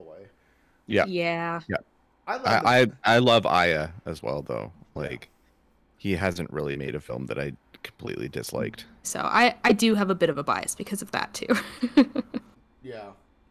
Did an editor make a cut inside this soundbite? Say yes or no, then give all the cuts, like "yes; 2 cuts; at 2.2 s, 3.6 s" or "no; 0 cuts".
yes; 1 cut; at 9.0 s